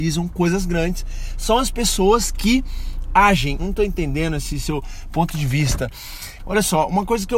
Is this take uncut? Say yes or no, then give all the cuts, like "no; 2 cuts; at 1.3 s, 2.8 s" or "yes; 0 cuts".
no; 2 cuts; at 3.6 s, 6.4 s